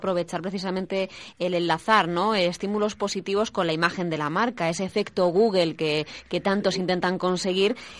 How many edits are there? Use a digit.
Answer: 0